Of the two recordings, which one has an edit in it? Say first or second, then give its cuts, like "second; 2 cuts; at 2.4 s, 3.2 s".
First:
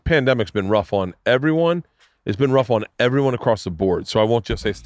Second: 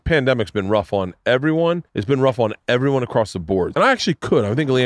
second; 2 cuts; at 1.9 s, 3.7 s